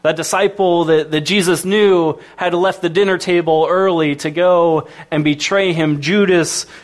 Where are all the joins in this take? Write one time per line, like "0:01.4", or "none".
none

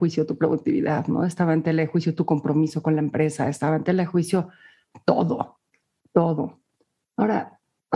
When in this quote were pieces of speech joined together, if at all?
none

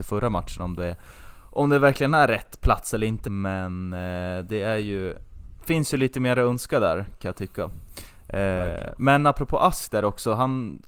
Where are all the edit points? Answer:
0:03.2

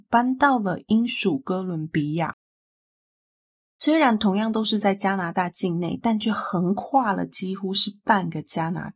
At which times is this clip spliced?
none

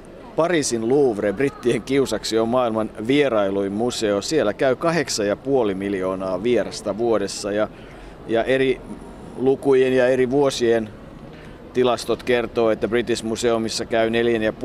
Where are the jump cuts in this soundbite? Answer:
none

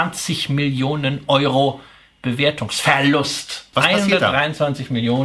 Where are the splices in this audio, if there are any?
0:03.7

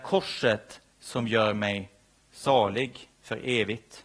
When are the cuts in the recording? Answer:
0:03.1

